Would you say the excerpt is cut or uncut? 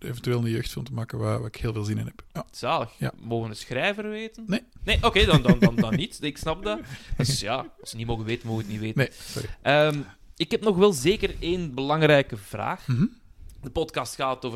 uncut